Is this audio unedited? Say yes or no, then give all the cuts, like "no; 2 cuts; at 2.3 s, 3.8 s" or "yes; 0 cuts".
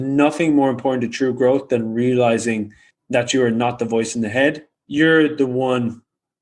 yes; 0 cuts